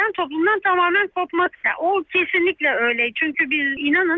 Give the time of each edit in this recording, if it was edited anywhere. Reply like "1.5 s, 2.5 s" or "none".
1.5 s